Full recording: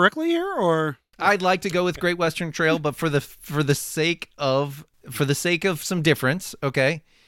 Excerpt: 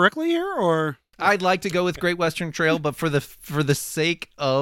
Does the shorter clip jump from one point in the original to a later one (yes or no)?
no